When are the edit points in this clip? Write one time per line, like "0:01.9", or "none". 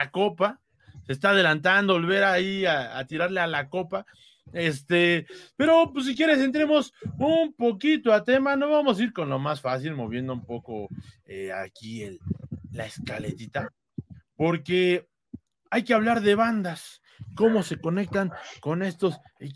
none

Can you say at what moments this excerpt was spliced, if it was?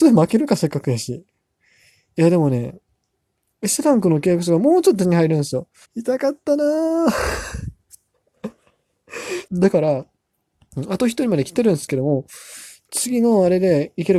0:05.8
0:09.5

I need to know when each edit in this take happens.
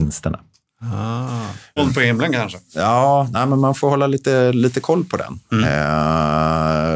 0:01.8

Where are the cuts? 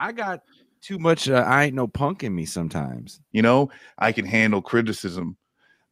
0:03.3

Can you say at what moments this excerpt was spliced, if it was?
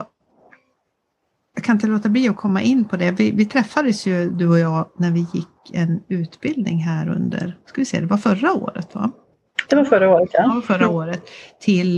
none

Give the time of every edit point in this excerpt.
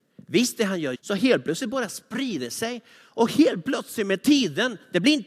0:00.9

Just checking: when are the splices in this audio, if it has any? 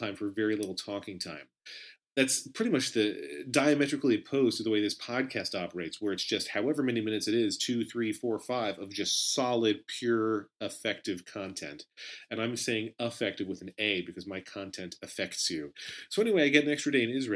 none

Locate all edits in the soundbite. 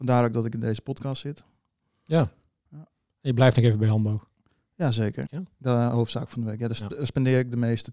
0:05.3

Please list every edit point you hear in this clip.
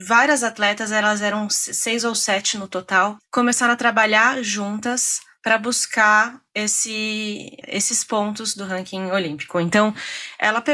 0:07.6

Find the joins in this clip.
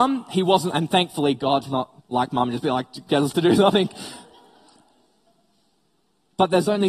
0:02.0

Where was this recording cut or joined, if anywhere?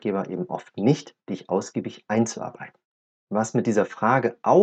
none

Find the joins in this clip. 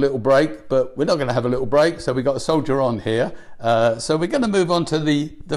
none

